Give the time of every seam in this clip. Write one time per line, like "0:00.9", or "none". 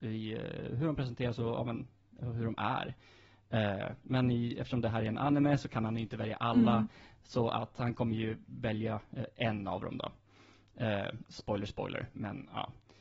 none